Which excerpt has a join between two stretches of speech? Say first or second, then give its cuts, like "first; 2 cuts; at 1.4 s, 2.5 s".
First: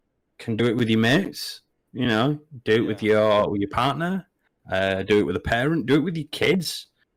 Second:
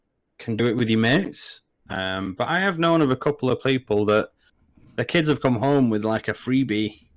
second; 1 cut; at 1.7 s